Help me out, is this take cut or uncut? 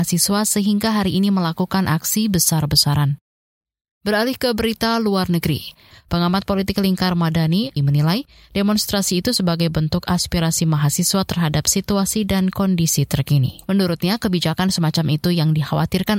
cut